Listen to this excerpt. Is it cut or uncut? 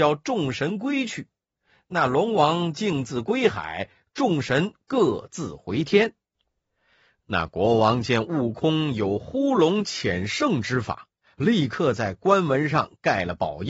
uncut